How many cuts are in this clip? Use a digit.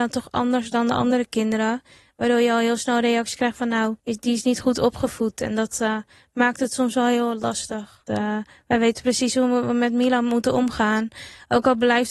2